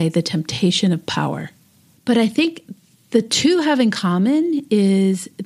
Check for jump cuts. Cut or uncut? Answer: cut